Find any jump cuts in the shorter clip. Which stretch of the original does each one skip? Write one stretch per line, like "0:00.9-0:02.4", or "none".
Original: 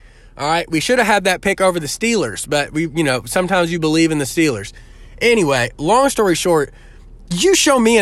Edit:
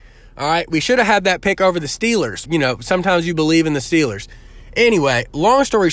0:02.5-0:02.9